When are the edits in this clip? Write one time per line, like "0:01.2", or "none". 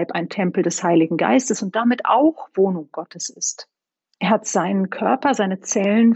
0:04.0